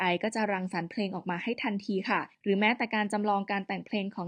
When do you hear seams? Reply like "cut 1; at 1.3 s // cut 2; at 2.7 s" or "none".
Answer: cut 1; at 2.3 s